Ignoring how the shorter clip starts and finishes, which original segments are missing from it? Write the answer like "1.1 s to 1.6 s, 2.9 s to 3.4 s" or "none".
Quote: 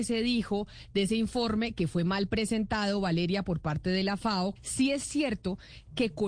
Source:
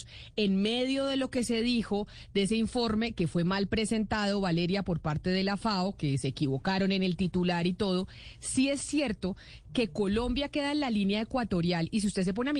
6.0 s to 8.3 s